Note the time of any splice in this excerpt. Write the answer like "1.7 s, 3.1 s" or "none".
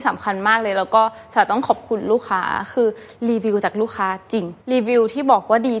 4.6 s